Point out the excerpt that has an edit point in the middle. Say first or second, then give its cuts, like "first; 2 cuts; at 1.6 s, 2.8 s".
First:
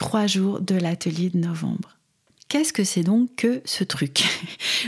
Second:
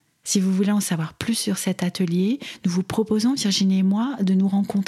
first; 1 cut; at 2.3 s